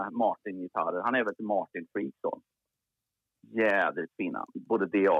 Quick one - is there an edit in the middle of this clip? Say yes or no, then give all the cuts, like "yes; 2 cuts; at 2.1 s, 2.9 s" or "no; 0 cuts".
no; 0 cuts